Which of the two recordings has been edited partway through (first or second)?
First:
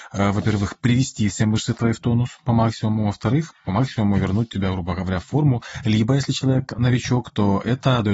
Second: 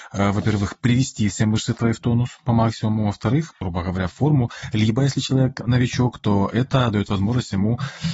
second